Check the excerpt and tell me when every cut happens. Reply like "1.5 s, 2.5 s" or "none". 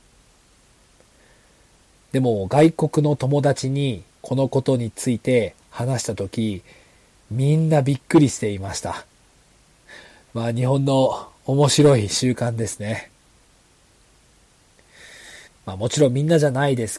15.5 s